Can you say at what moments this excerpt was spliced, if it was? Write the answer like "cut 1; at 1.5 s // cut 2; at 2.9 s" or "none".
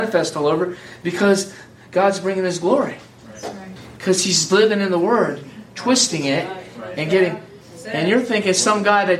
cut 1; at 3.9 s